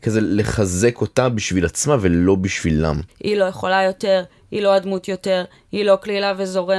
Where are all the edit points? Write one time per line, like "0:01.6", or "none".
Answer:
0:03.1